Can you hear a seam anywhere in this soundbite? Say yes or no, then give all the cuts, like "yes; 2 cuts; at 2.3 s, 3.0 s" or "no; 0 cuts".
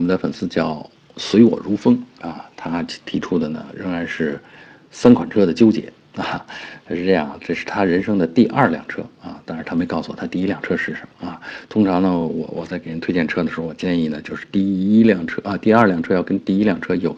no; 0 cuts